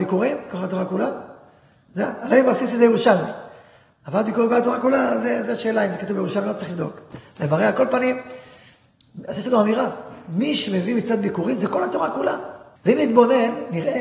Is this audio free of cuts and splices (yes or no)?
no